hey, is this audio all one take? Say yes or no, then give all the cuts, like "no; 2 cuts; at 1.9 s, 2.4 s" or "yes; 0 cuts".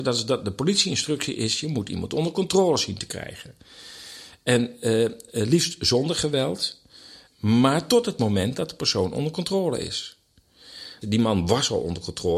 no; 2 cuts; at 7.3 s, 11.0 s